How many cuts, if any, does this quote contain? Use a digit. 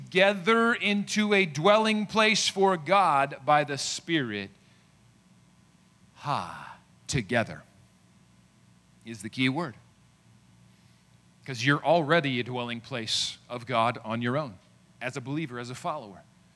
1